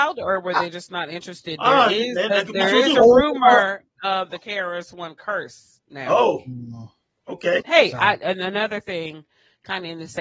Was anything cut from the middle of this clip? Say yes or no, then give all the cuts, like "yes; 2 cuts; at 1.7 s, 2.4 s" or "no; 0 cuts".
yes; 1 cut; at 7.6 s